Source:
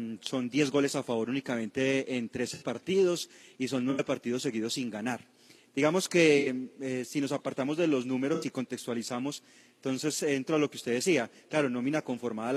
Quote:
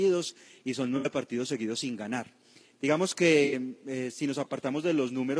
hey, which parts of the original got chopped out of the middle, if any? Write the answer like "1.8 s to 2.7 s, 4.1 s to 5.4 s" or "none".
none

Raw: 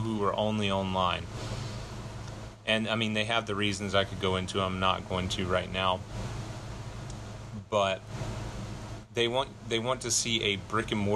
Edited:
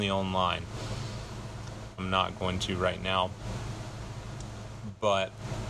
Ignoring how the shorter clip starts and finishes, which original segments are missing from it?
2.6 s to 4.7 s

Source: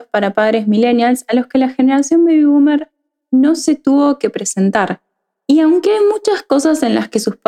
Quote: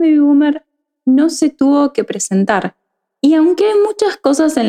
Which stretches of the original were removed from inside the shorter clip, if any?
none

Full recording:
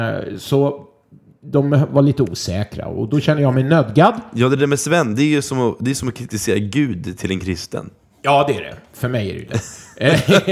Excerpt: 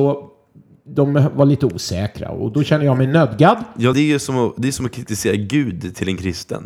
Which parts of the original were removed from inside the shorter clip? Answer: 4.5 s to 5.2 s

